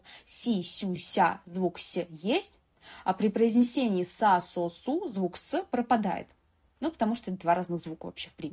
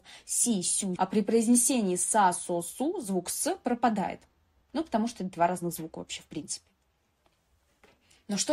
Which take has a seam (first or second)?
second